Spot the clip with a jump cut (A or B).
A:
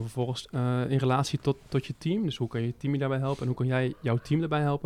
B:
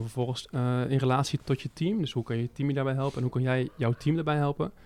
B